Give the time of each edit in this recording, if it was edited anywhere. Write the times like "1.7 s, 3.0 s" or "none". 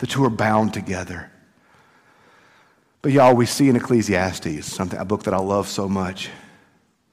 none